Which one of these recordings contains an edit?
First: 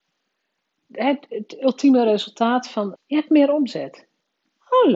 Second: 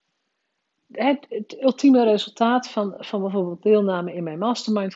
first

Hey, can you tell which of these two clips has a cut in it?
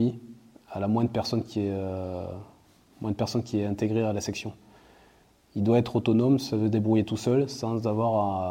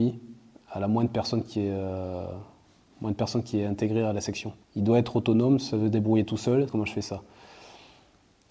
second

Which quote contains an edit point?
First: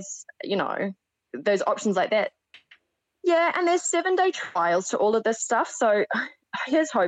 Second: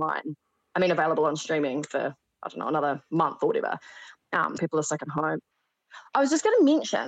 second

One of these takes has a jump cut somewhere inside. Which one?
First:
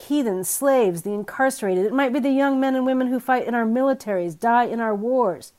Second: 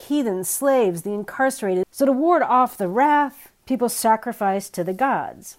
second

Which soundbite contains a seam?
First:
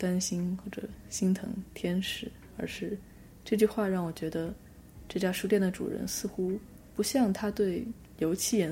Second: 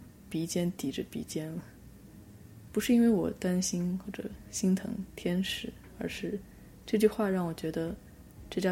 second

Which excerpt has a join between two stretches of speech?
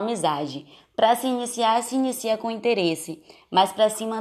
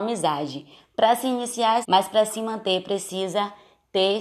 second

